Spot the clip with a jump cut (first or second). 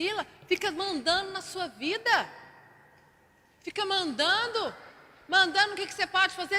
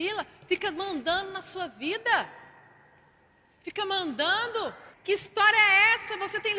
second